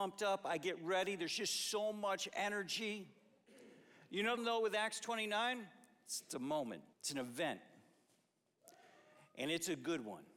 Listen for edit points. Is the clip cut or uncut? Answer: cut